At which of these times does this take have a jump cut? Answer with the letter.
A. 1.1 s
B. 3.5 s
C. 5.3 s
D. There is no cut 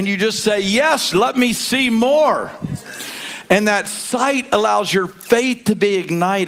A